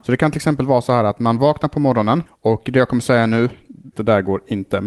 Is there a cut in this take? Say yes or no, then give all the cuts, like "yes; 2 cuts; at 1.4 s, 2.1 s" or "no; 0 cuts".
yes; 2 cuts; at 2.3 s, 3.9 s